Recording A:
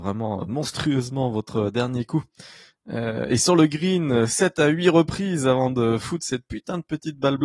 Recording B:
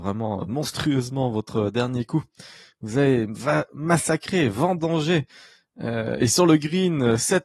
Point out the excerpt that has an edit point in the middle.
A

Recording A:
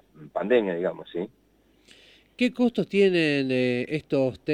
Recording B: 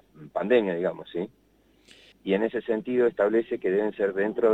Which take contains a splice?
B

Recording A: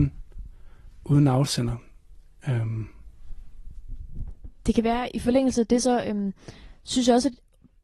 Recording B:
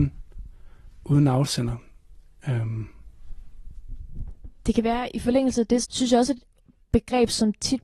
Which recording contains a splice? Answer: B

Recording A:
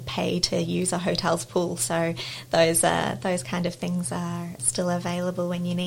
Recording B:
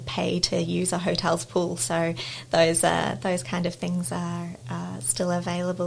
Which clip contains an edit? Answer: A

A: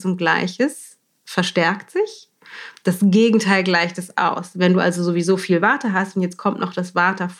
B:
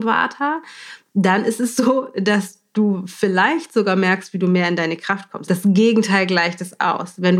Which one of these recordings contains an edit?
B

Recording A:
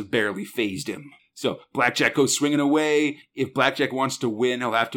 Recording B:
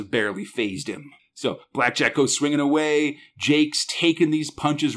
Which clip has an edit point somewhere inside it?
A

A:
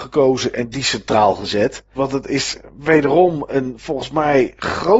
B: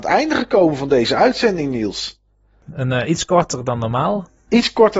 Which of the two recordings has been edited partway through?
A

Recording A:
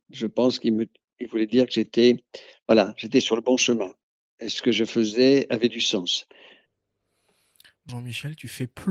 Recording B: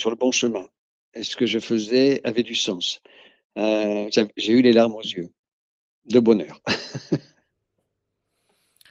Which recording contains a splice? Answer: A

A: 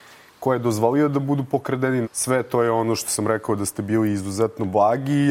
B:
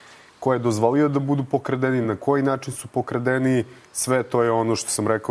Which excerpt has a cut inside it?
A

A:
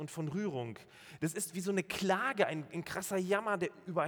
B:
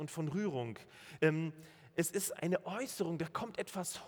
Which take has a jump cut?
B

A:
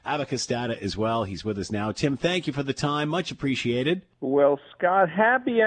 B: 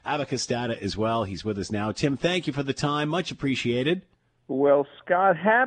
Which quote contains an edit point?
A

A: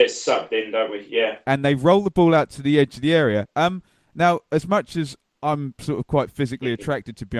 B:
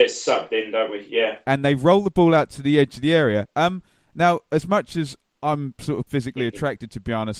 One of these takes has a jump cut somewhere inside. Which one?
B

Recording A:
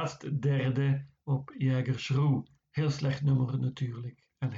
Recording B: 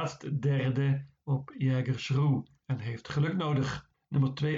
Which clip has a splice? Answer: B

